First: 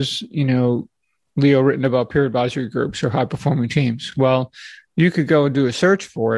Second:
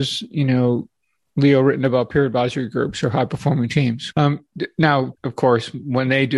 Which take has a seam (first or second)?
second